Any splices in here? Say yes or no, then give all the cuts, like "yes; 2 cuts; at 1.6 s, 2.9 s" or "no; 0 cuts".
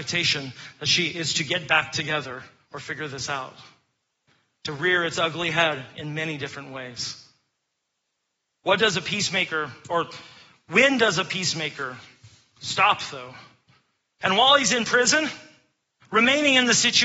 yes; 2 cuts; at 4.6 s, 14.2 s